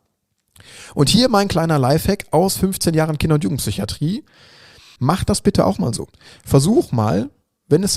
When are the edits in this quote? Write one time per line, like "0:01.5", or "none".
0:05.0